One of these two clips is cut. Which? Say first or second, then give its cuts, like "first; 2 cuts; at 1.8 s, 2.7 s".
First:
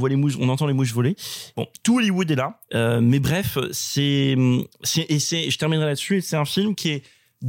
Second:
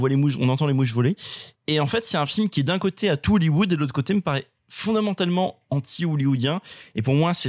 first; 2 cuts; at 1.5 s, 2.7 s